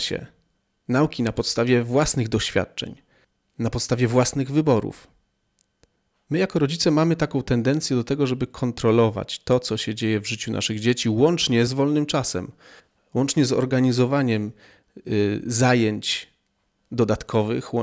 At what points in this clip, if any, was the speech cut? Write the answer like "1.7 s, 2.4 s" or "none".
11.7 s